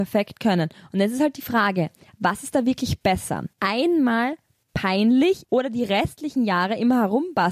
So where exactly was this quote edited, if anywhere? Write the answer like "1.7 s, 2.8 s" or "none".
3.5 s, 5.4 s